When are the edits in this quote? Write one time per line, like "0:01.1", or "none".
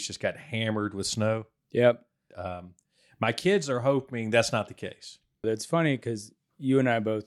0:02.3
0:05.4